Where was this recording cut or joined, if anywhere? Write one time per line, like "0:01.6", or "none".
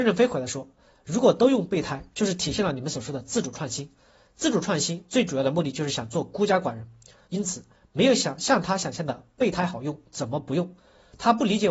0:07.2